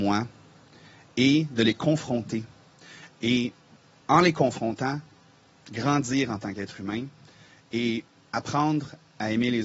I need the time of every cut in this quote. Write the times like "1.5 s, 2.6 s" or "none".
none